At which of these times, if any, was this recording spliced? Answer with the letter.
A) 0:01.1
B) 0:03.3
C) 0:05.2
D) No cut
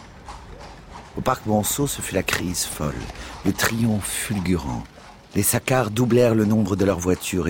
D